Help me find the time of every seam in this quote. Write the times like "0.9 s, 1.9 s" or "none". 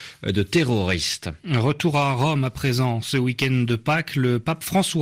none